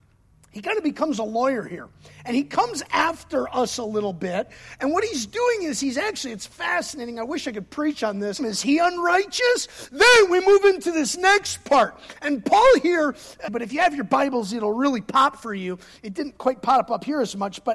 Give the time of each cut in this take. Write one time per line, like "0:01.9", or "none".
0:08.4
0:13.5